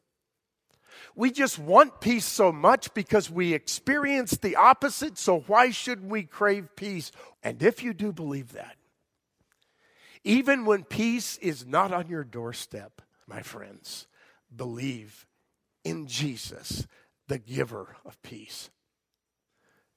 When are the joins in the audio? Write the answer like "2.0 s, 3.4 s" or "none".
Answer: 7.3 s, 13.2 s